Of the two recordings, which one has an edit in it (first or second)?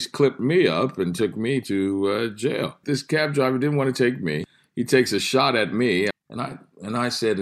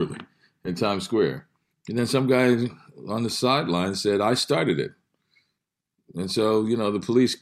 first